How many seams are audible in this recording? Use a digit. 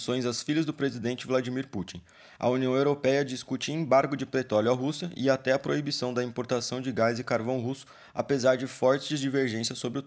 0